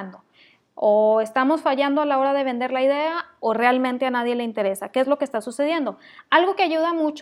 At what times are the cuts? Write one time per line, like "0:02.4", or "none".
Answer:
none